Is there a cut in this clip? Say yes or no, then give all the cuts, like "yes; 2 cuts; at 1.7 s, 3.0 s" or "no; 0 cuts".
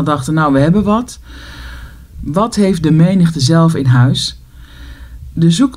yes; 1 cut; at 2.1 s